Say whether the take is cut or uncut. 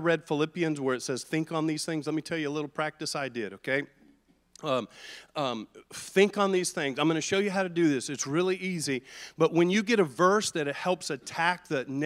uncut